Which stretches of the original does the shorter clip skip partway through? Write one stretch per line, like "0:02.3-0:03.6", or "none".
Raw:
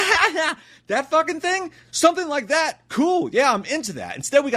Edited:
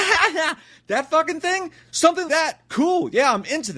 0:02.3-0:02.5